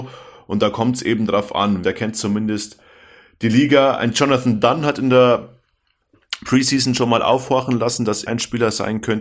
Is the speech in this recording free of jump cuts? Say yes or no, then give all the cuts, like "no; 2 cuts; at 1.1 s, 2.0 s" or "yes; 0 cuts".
no; 2 cuts; at 1.8 s, 8.3 s